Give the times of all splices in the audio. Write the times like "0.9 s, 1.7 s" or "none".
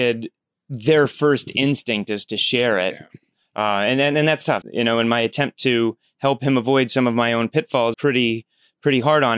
4.6 s, 7.9 s